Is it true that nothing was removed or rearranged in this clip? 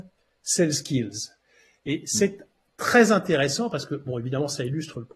yes; 0 cuts

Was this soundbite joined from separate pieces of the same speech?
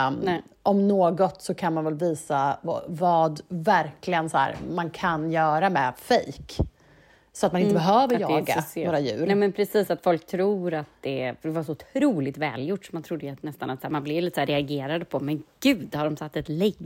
no; 0 cuts

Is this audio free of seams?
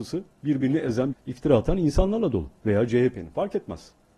no; 1 cut; at 1.1 s

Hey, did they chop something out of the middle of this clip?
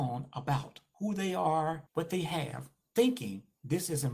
yes; 1 cut; at 1.9 s

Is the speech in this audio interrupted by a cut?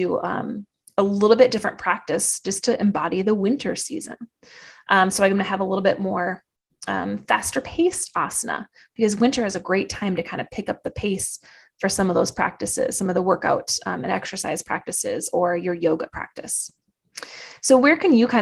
no; 0 cuts

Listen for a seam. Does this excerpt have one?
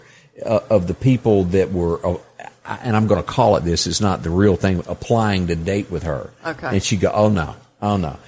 no; 0 cuts

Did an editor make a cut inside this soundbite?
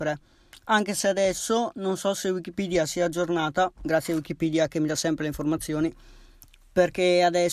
no; 0 cuts

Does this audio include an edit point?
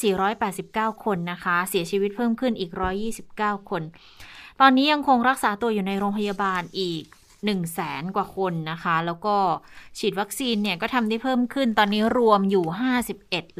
no; 0 cuts

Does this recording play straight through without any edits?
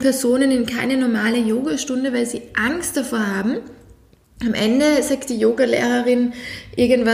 yes; 0 cuts

